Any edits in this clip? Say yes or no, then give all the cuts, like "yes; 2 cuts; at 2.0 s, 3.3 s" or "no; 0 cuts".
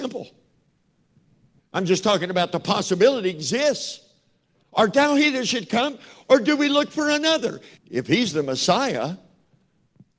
yes; 3 cuts; at 1.6 s, 4.6 s, 7.8 s